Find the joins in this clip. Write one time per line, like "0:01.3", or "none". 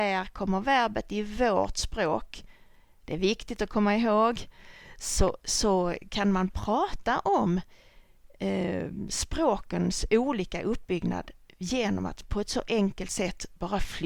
0:03.0